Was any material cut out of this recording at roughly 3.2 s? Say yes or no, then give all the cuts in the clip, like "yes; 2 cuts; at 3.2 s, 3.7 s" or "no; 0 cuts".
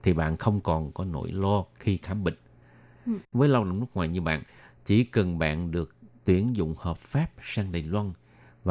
yes; 1 cut; at 3.2 s